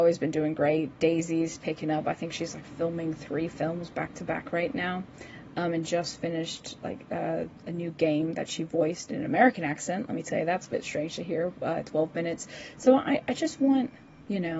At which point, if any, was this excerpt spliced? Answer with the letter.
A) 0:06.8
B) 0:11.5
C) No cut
C